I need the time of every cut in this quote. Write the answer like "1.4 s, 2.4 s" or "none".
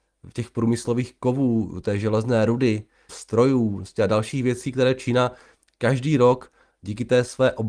3.1 s

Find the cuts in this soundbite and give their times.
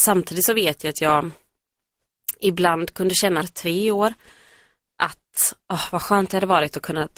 3.4 s, 5.6 s

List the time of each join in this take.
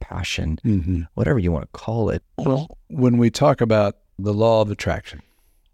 2.2 s, 4.2 s

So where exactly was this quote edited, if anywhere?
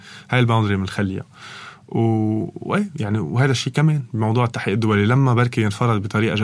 none

